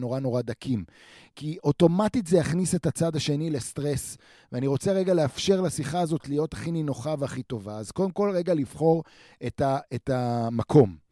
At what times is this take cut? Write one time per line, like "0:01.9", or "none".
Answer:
none